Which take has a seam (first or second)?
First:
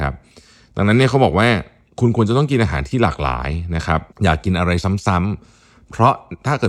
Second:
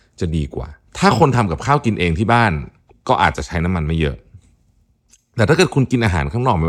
first